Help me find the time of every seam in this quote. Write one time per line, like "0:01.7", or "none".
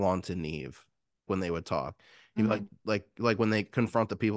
0:01.3